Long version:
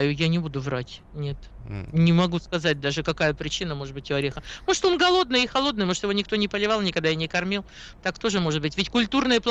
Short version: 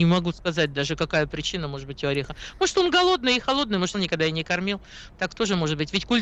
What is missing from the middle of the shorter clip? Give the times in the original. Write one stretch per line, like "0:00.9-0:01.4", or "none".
0:06.0-0:06.8